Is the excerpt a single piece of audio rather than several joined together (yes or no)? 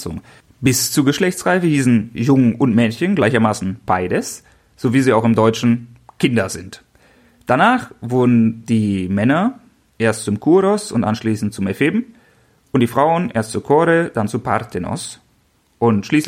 yes